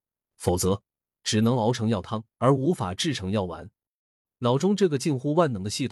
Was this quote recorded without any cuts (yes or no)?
no